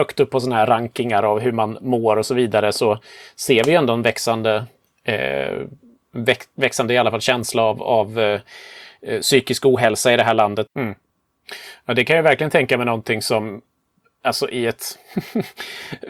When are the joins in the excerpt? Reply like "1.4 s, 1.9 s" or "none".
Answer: 10.7 s